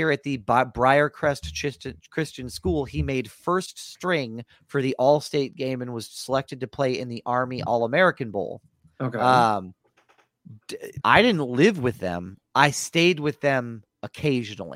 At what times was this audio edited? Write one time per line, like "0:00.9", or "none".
0:11.0